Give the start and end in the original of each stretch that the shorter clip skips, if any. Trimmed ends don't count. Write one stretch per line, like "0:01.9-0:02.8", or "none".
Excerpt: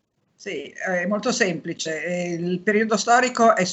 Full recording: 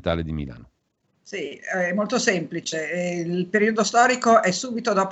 none

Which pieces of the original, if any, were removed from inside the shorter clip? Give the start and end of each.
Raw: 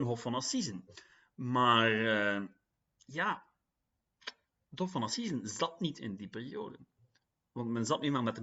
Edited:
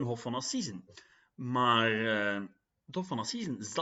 0:02.7-0:04.5

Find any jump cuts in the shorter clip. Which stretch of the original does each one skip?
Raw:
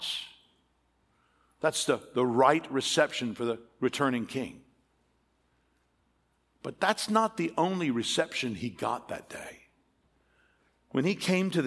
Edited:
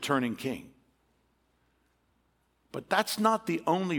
none

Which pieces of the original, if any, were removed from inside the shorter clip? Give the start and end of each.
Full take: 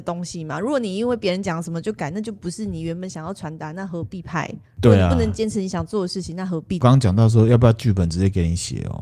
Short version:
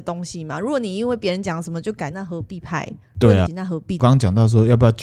0:02.1-0:03.7
0:05.1-0:06.3

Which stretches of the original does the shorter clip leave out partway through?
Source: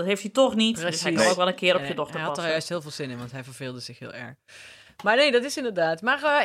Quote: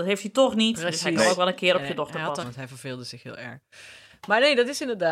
0:02.4-0:03.2

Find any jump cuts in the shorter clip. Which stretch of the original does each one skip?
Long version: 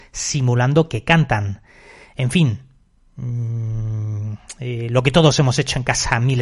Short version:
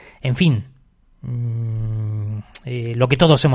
none

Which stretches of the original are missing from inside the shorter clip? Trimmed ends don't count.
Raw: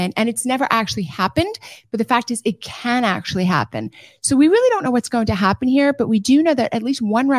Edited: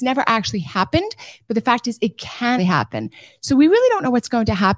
0:03.0-0:03.4

